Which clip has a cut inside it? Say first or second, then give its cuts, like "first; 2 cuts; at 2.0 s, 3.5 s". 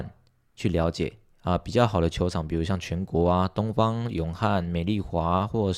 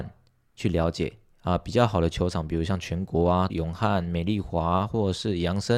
second; 1 cut; at 3.5 s